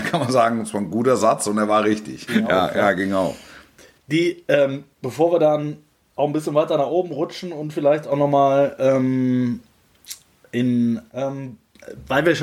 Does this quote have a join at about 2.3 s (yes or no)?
yes